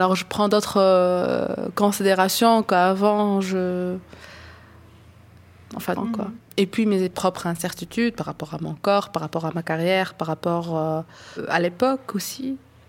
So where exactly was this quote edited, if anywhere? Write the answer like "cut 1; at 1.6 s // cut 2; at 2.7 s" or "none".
cut 1; at 6.0 s